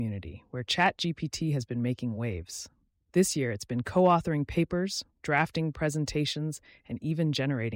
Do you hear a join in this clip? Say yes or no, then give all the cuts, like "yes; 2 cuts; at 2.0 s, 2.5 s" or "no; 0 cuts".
no; 0 cuts